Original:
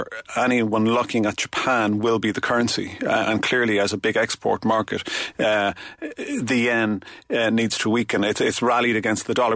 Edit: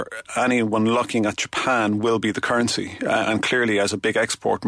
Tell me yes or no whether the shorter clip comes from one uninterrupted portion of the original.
yes